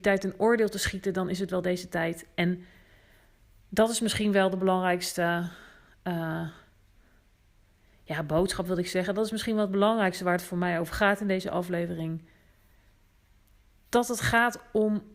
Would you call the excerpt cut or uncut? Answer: uncut